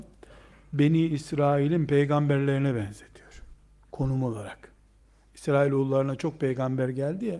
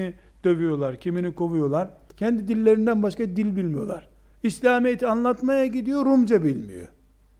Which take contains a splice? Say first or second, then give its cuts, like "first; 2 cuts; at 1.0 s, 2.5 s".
second; 1 cut; at 2.1 s